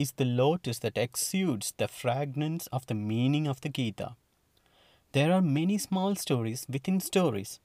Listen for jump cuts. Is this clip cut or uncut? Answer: uncut